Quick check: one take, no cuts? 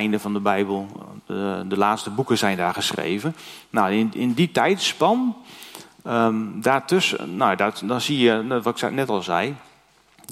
yes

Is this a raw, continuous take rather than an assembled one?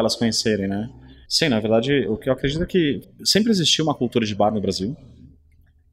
no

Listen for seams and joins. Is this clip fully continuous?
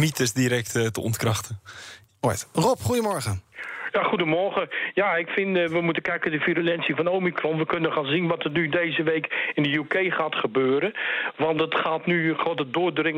yes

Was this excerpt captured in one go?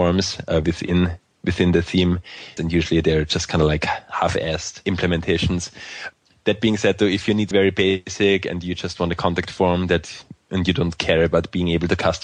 no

